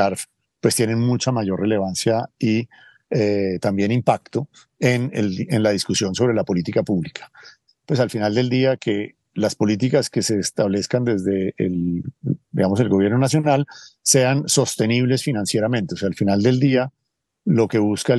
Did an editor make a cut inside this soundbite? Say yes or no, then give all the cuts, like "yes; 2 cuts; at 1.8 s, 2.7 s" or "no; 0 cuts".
yes; 1 cut; at 7.7 s